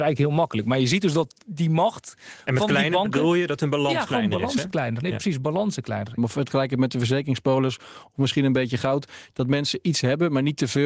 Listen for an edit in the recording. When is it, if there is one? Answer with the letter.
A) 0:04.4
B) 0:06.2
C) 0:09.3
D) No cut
B